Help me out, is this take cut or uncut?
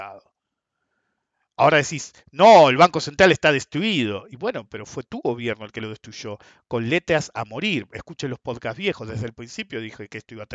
uncut